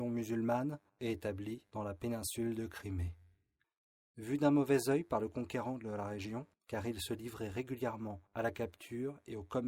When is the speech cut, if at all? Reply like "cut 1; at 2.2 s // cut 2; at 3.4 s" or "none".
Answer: none